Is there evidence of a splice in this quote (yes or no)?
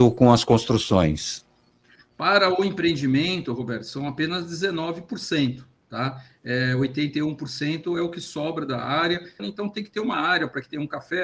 yes